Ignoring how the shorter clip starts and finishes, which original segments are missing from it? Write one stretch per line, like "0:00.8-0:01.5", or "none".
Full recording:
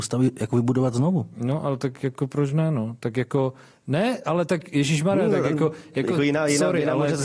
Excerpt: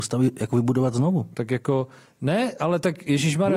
0:01.3-0:03.0